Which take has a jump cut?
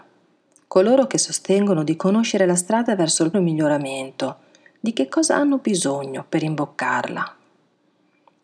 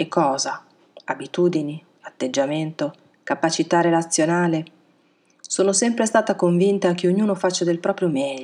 first; 1 cut; at 3.3 s

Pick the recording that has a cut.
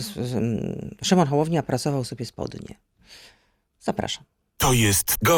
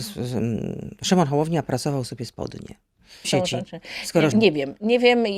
second; 2 cuts; at 3.2 s, 4.3 s

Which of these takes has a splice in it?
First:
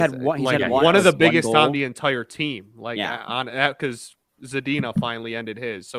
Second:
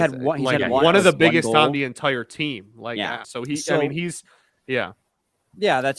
second; 1 cut; at 3.2 s

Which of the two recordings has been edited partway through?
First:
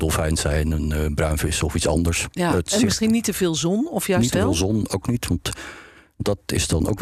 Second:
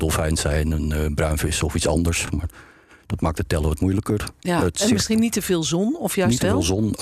first; 1 cut; at 2.3 s

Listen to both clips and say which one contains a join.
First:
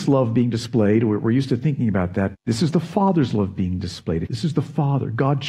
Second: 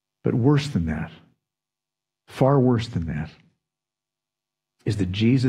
first; 2 cuts; at 2.3 s, 4.3 s

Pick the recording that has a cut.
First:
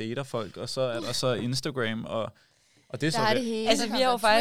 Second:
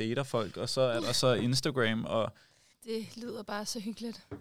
second; 1 cut; at 2.7 s

